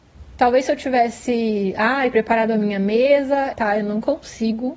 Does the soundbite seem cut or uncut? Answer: cut